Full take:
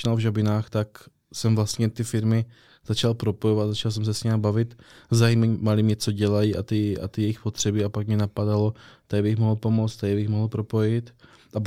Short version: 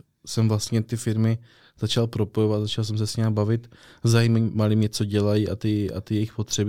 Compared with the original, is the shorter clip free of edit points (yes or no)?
yes